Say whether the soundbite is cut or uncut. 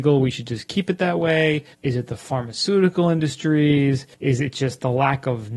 cut